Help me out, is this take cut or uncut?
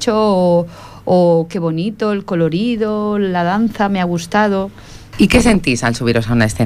cut